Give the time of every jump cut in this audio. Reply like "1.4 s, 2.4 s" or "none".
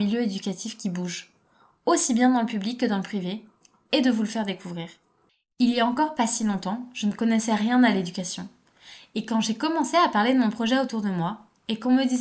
none

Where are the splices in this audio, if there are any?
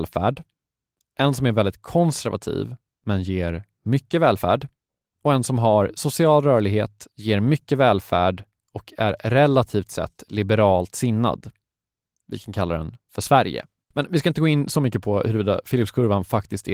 5.1 s, 13.9 s

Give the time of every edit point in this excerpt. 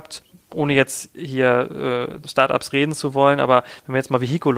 2.2 s

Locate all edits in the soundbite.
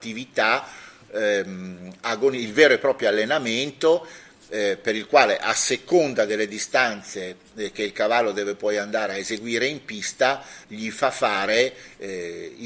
10.6 s

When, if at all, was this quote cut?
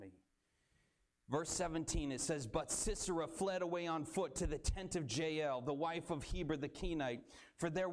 none

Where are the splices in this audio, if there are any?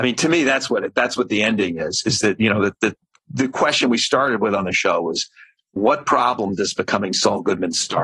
none

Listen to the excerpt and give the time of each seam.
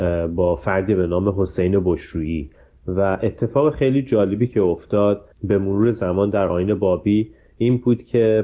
5.3 s

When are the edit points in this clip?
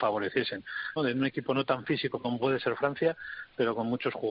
1.0 s

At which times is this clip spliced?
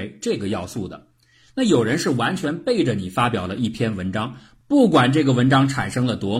none

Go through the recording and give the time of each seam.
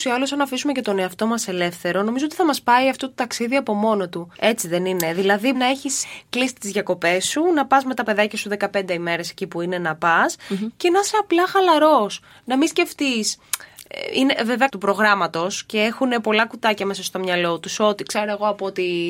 4.3 s, 5.5 s, 14.7 s

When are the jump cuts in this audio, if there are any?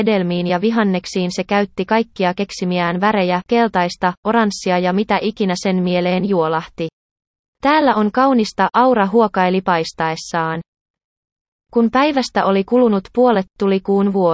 3.4 s

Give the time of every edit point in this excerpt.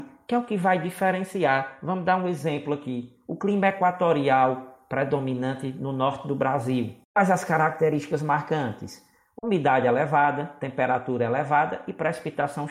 7.0 s

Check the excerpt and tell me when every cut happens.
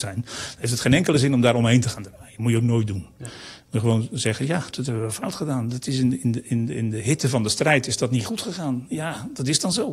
4.7 s

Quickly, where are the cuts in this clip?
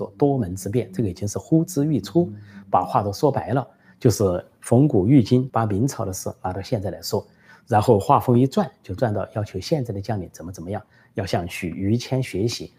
5.5 s

